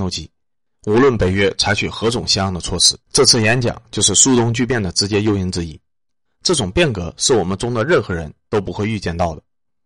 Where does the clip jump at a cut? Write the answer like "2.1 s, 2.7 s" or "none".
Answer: 3.0 s, 6.3 s